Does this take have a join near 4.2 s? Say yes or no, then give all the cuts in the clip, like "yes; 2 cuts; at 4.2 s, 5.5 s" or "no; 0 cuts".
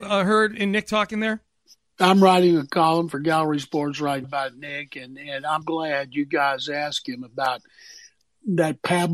yes; 2 cuts; at 4.2 s, 5.6 s